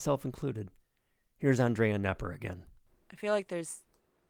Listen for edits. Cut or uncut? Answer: uncut